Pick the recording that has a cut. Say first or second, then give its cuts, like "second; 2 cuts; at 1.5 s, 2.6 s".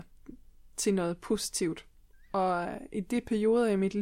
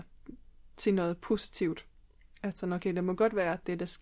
first; 1 cut; at 2.1 s